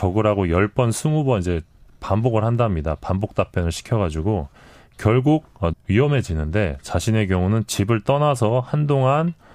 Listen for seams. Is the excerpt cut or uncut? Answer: cut